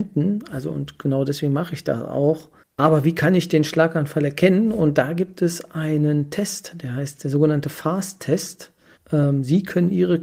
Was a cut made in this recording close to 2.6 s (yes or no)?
yes